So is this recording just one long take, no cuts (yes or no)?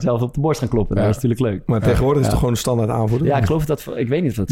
yes